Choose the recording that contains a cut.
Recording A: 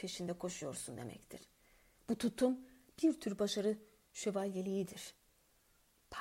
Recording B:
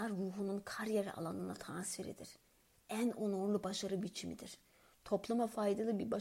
B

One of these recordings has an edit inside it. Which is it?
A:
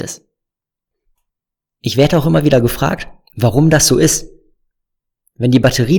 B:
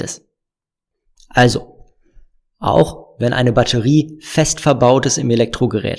B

